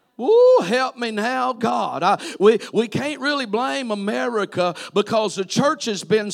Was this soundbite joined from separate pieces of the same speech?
no; 0 cuts

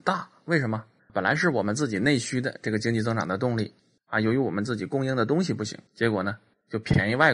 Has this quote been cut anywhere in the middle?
yes; 2 cuts; at 1.0 s, 5.9 s

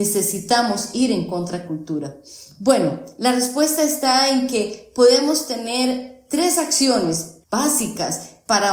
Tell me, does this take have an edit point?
yes; 1 cut; at 7.4 s

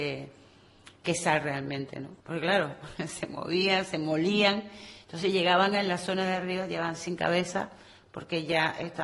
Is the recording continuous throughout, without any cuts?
no; 1 cut; at 2.2 s

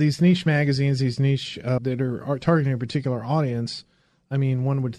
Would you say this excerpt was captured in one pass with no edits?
no; 1 cut; at 1.8 s

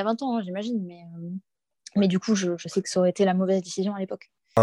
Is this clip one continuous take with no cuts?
yes; 0 cuts

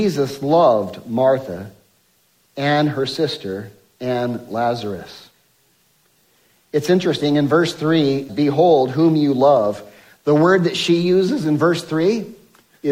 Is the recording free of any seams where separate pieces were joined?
no; 1 cut; at 8.3 s

